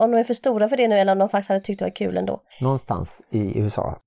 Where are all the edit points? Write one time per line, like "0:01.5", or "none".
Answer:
0:02.5